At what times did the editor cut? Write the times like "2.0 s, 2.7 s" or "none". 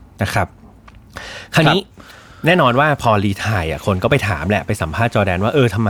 none

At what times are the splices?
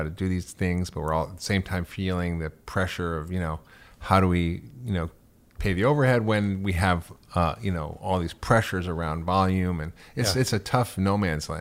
none

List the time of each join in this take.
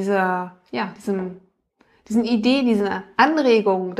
none

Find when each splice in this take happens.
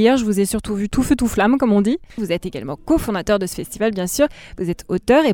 2.2 s

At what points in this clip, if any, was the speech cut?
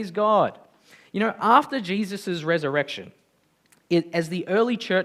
none

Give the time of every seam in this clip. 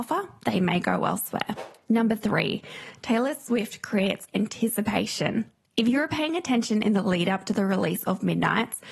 none

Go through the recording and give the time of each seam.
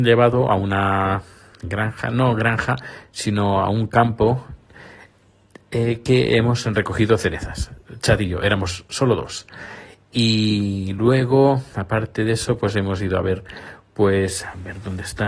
none

